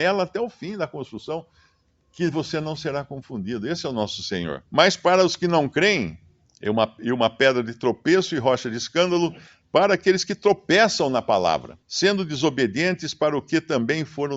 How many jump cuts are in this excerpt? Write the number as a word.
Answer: three